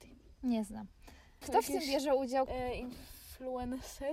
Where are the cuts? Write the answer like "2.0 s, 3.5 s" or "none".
1.4 s, 2.5 s